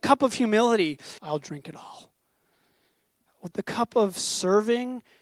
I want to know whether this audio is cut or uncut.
cut